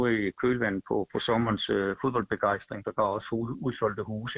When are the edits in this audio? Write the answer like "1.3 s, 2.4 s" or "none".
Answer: 1.1 s, 2.8 s